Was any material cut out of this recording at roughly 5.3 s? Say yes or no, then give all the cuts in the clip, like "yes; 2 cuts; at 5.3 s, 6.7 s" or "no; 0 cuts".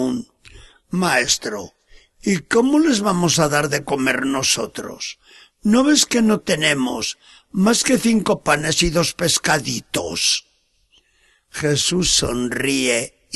no; 0 cuts